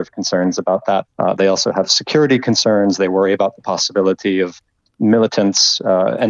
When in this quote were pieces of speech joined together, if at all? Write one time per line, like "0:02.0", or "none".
0:01.1

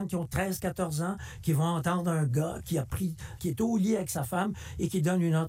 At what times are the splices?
0:03.4

